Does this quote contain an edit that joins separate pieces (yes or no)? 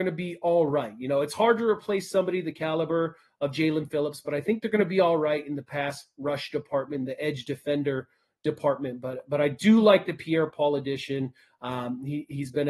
no